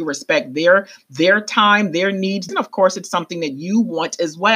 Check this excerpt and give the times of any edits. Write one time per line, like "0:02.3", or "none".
0:02.5